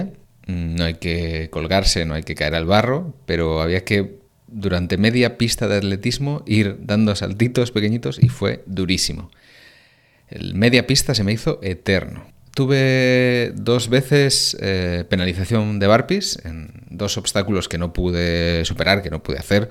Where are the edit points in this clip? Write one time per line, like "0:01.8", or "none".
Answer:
none